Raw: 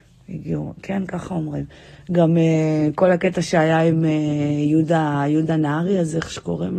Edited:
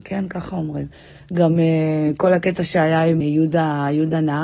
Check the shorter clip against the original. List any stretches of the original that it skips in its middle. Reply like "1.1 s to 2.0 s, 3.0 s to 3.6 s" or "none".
4.0 s to 4.6 s